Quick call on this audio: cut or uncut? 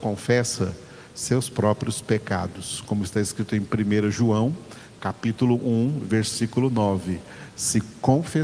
uncut